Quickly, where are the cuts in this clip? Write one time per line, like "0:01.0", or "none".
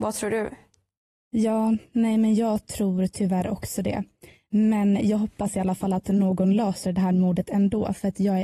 none